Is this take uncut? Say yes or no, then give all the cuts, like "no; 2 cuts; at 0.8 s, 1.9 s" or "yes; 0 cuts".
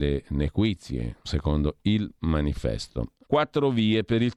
no; 2 cuts; at 1.2 s, 3.3 s